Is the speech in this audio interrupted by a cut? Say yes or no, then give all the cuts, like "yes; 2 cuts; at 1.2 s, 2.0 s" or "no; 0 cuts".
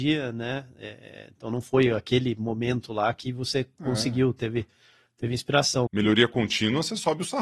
yes; 1 cut; at 5.9 s